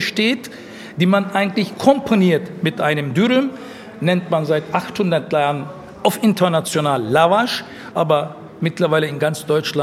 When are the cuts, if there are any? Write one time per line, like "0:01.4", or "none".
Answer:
0:07.9